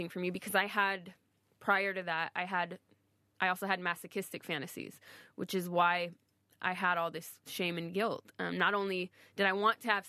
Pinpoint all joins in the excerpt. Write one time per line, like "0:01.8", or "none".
none